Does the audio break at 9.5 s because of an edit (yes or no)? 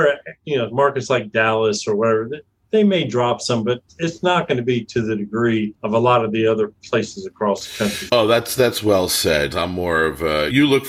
yes